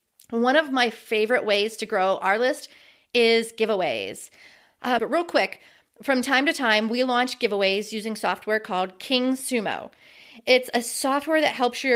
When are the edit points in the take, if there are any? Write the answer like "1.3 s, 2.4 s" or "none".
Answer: 5.0 s